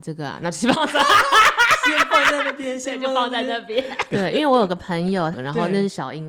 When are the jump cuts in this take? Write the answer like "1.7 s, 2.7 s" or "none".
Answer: 4.1 s, 5.3 s